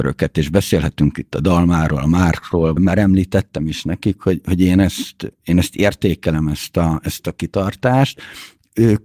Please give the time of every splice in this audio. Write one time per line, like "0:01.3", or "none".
0:02.8